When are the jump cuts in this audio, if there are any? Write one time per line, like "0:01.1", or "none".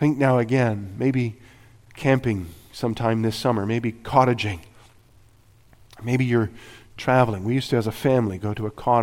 none